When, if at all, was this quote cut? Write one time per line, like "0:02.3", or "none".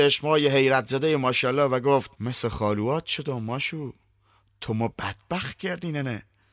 0:02.1

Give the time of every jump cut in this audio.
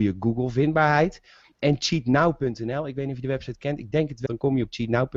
0:04.3

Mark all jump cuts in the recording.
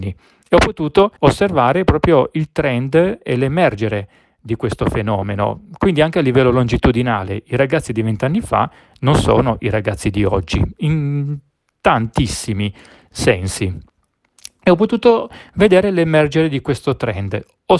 0:01.2

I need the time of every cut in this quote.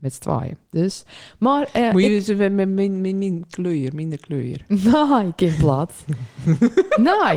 none

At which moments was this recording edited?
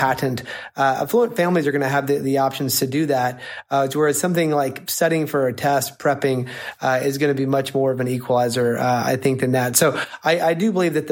none

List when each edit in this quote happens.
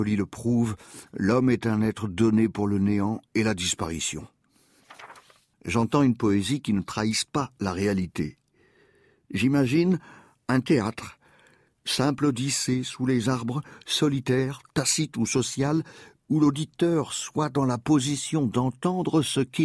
0:05.5

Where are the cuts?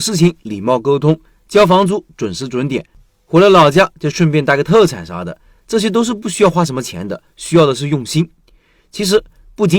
none

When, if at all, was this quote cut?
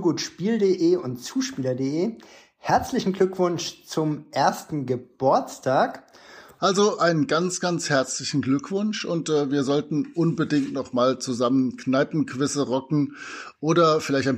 0:06.6

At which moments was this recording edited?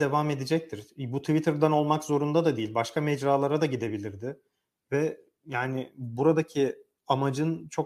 0:04.7

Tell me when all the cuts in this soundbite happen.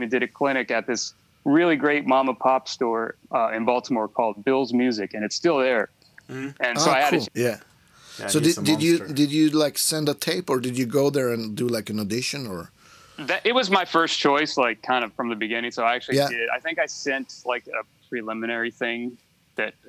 0:07.2

